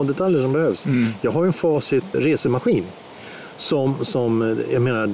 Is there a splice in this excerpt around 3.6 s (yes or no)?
no